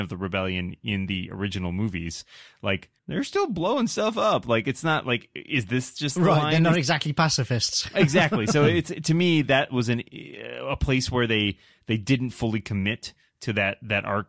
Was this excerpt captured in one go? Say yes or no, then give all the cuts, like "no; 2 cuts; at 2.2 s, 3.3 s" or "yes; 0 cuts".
no; 1 cut; at 3.0 s